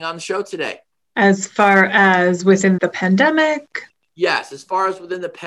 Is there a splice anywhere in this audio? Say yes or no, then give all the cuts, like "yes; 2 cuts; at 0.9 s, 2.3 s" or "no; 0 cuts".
yes; 2 cuts; at 1.0 s, 2.8 s